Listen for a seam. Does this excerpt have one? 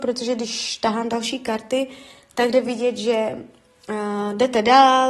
no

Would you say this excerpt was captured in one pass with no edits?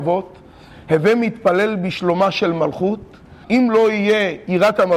no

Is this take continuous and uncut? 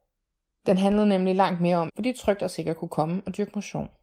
no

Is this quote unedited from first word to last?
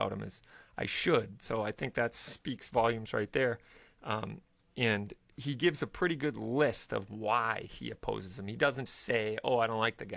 no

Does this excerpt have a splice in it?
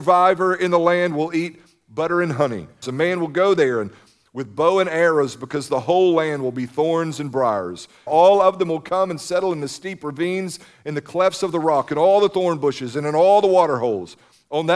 yes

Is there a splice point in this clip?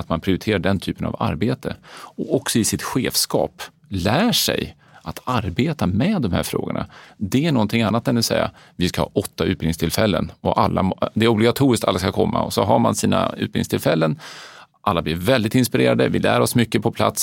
no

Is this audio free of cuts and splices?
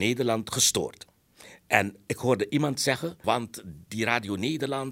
no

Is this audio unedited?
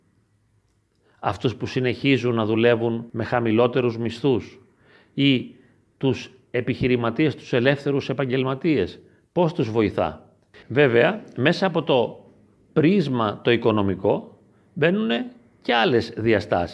no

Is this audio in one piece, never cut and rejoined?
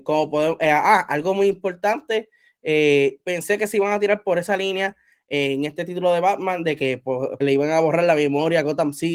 no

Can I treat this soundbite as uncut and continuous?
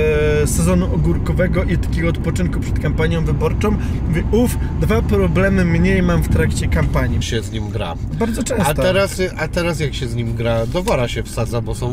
no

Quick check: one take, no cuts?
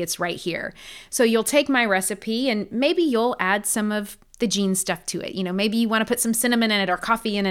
yes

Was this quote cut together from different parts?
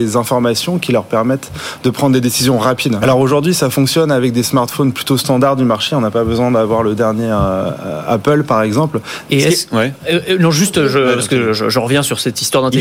yes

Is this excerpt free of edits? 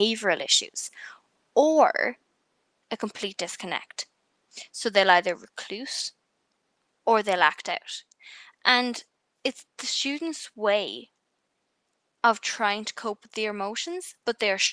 yes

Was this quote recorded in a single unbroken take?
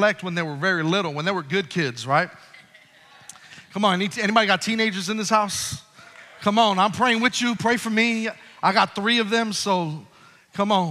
yes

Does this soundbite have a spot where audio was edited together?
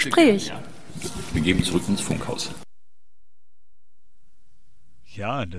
no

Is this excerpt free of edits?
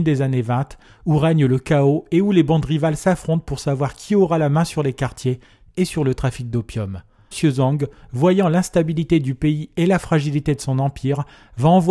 no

